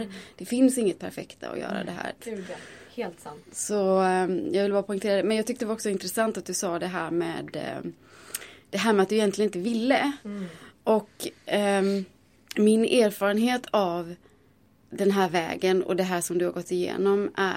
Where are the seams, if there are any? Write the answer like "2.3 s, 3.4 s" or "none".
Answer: 2.2 s